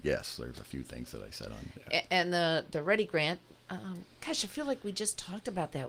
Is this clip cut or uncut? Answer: uncut